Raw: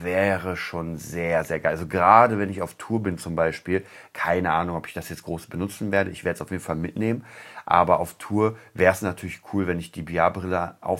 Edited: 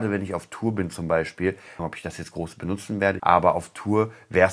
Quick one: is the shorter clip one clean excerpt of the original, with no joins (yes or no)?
no